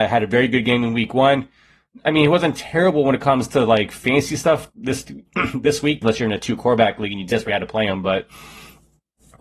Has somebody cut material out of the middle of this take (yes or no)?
yes